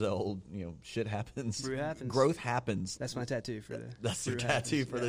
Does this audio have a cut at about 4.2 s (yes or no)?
no